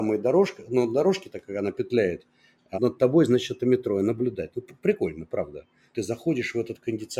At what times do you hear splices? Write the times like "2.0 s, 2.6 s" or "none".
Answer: 2.7 s, 5.9 s